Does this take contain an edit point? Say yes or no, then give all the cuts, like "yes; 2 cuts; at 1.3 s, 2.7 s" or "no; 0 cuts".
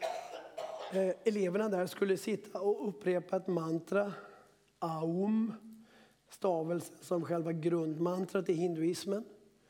no; 0 cuts